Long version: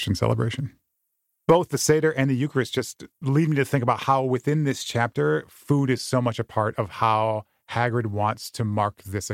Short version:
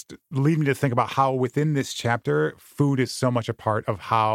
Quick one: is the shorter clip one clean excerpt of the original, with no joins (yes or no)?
yes